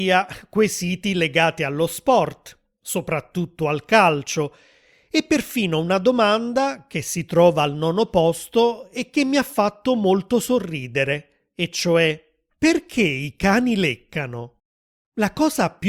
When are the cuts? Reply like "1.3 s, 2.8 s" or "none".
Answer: none